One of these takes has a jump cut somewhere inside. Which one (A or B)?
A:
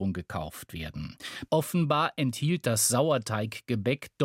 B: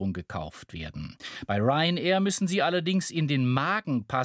A